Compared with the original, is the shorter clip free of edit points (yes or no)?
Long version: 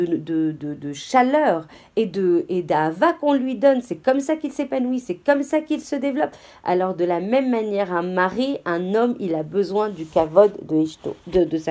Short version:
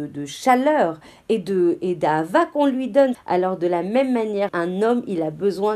no